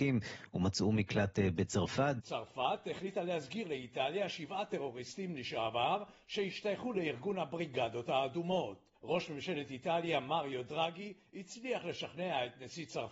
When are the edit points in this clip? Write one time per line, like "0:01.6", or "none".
0:02.2

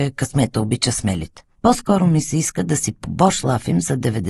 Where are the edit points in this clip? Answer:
0:01.5

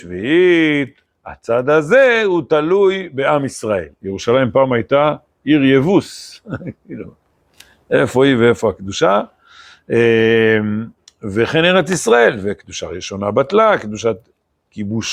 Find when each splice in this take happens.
0:01.1
0:03.9

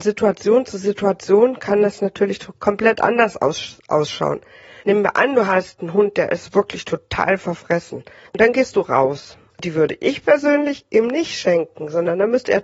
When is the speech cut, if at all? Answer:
0:04.8
0:08.3
0:09.5

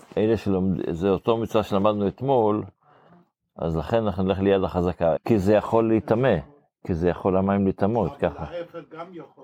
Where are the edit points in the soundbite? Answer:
0:05.2

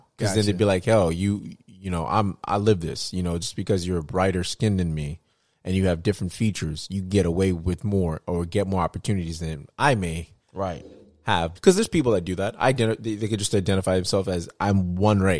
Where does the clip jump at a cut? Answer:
0:11.6

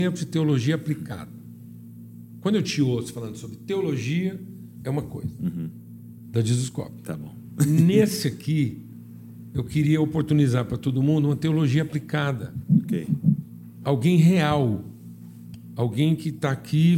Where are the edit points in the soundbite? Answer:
0:06.3

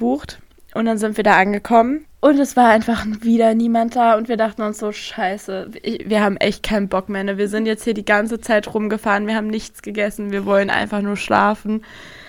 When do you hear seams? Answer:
0:02.0

